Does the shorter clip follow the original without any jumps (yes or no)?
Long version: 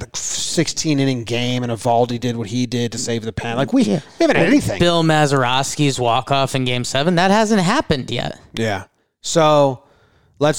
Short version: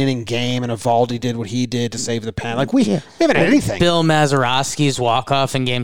yes